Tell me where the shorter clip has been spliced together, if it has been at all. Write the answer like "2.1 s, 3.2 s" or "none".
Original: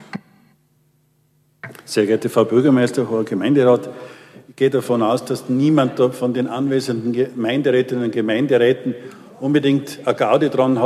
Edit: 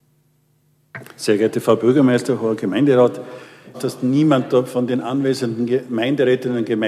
3.7 s